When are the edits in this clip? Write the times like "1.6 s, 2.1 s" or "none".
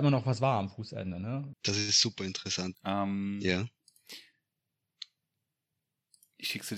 1.5 s, 2.7 s